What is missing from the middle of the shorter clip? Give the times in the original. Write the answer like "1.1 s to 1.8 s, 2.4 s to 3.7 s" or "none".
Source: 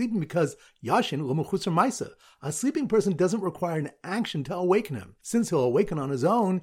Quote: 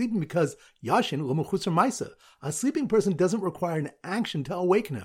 none